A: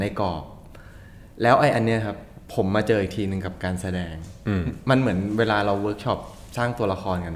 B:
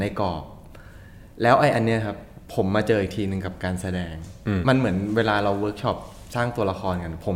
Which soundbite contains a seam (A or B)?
B